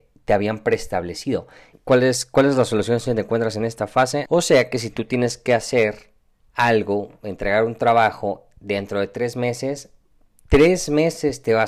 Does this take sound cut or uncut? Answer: cut